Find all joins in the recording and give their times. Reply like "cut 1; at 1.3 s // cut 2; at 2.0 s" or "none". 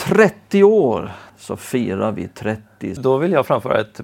cut 1; at 1.3 s // cut 2; at 3.0 s